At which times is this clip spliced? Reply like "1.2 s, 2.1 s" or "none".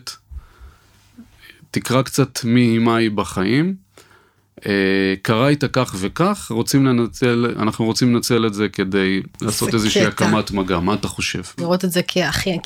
11.6 s